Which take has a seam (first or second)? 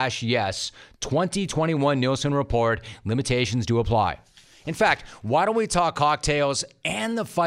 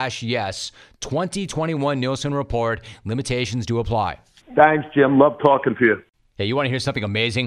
second